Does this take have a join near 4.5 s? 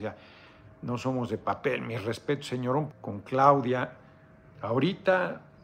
yes; 2 cuts; at 2.9 s, 4.5 s

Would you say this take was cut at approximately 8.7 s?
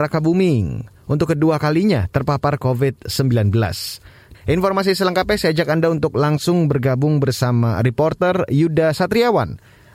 no; 1 cut; at 4.3 s

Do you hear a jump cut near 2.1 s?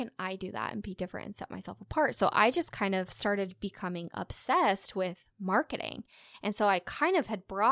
no; 0 cuts

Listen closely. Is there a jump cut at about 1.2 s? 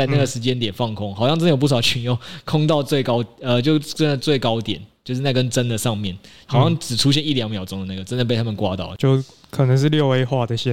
no; 1 cut; at 4.2 s

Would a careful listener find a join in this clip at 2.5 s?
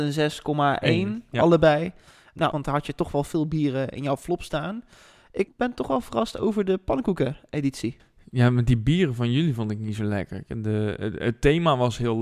yes; 1 cut; at 2.5 s

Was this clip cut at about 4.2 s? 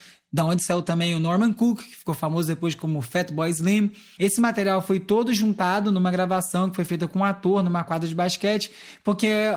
yes; 1 cut; at 4.2 s

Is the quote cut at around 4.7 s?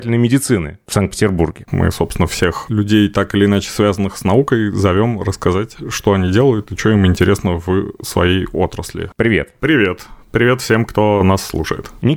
no; 2 cuts; at 1.7 s, 9.1 s

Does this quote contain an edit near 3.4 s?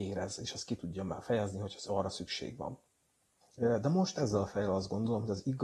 yes; 1 cut; at 3.4 s

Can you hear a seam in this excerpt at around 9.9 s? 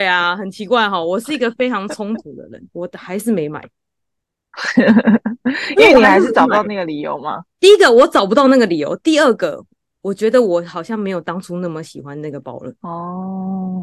no; 2 cuts; at 2.7 s, 7.5 s

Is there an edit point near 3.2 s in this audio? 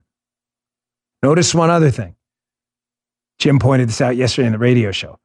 no; 1 cut; at 1.1 s

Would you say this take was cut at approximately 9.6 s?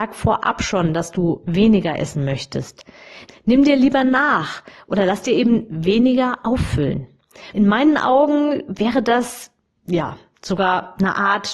no; 2 cuts; at 3.3 s, 7.5 s

